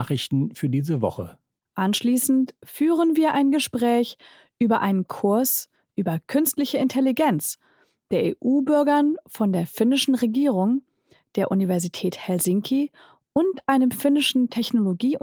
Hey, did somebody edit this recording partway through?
yes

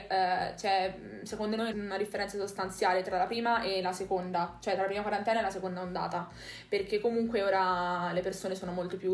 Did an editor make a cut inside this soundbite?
yes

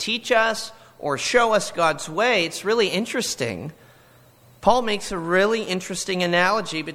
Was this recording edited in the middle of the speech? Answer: no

